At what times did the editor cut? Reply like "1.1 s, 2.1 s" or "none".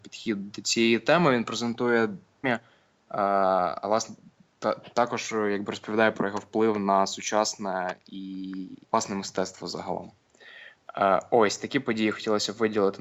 2.4 s, 8.8 s